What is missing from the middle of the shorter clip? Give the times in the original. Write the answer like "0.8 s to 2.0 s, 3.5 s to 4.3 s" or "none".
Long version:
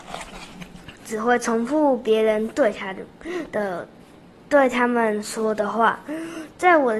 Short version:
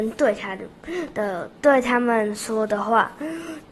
3.9 s to 4.4 s